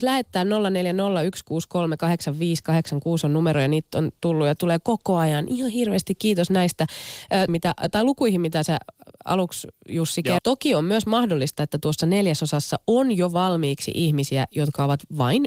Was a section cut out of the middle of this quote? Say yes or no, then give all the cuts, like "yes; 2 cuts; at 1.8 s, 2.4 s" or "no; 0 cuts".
yes; 2 cuts; at 7.5 s, 10.4 s